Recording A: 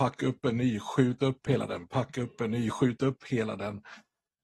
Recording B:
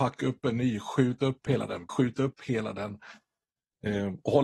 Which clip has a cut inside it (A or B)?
B